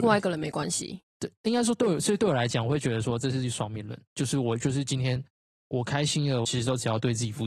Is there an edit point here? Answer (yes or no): yes